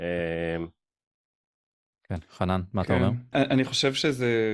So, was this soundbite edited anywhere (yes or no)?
yes